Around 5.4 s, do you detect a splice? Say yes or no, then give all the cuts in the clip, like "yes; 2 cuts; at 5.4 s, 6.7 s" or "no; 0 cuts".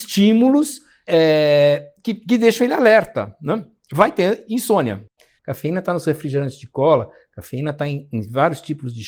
yes; 2 cuts; at 1.1 s, 5.4 s